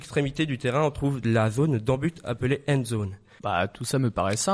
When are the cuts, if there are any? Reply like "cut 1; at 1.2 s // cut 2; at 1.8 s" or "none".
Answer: cut 1; at 3.4 s